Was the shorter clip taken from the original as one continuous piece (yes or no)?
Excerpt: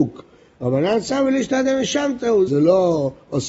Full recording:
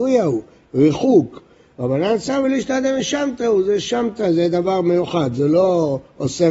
no